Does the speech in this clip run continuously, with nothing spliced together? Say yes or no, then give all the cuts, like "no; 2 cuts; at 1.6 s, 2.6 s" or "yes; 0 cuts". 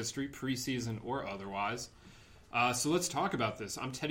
yes; 0 cuts